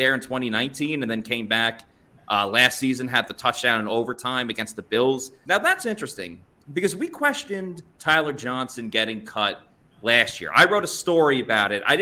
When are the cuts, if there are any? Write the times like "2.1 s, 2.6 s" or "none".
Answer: 5.4 s